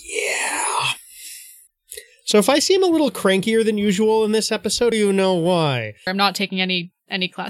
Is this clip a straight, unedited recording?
no; 2 cuts; at 4.9 s, 6.1 s

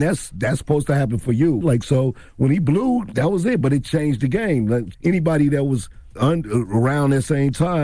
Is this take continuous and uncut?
no; 3 cuts; at 1.6 s, 4.9 s, 6.2 s

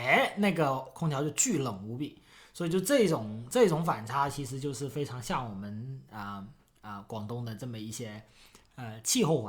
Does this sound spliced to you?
no; 0 cuts

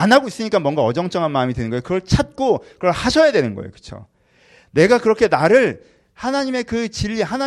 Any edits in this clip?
no; 0 cuts

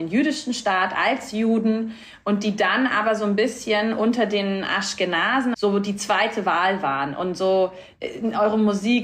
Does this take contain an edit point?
yes; 1 cut; at 5.5 s

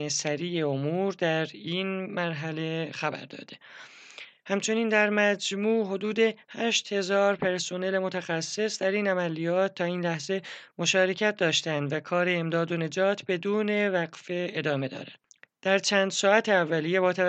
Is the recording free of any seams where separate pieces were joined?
yes; 0 cuts

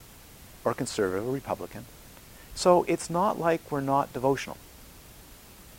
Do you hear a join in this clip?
yes; 1 cut; at 2.5 s

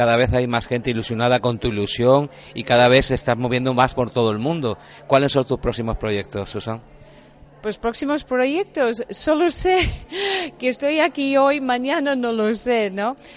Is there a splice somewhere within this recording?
no; 0 cuts

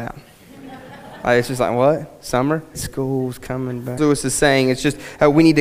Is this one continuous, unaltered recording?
no; 2 cuts; at 2.7 s, 4.0 s

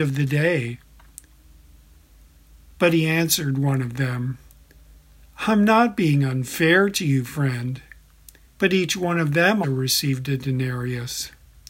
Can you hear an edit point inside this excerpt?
yes; 2 cuts; at 8.5 s, 9.6 s

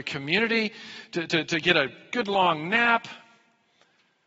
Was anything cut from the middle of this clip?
no; 0 cuts

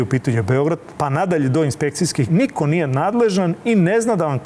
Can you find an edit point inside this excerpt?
yes; 2 cuts; at 1.0 s, 2.3 s

